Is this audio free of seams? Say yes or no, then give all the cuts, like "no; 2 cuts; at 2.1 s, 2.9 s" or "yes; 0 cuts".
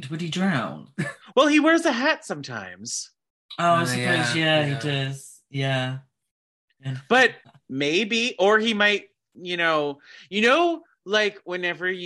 yes; 0 cuts